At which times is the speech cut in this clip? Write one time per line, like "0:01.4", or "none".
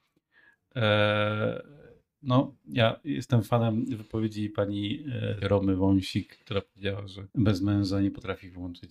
0:05.4
0:07.3